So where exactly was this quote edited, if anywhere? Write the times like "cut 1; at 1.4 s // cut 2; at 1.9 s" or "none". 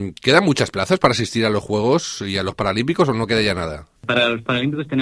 cut 1; at 4.0 s